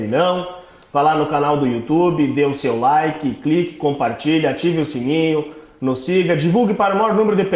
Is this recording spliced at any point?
no; 0 cuts

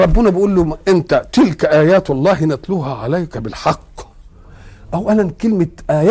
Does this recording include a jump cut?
no; 0 cuts

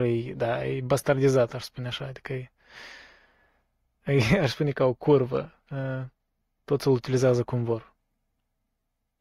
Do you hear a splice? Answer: no; 0 cuts

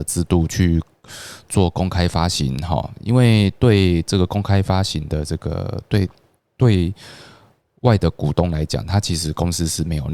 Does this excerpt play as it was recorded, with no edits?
yes; 0 cuts

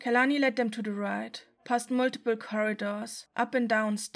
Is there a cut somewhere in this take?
no; 0 cuts

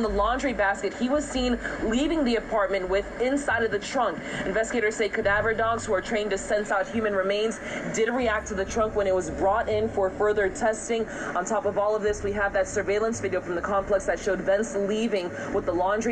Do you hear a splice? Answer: no; 0 cuts

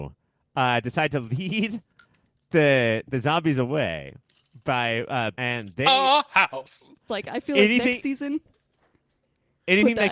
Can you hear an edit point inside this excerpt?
yes; 2 cuts; at 5.3 s, 7.1 s

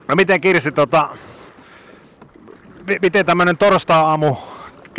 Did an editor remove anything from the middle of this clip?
no; 0 cuts

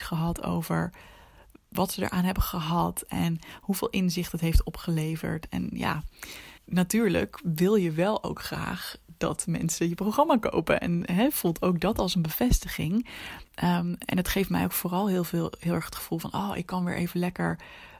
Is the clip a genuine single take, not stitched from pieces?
no; 1 cut; at 6.6 s

